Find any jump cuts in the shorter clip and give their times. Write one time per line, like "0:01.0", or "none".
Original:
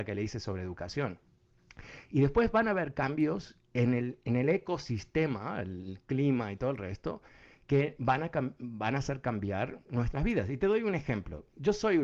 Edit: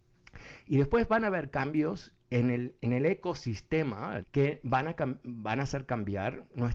0:04.2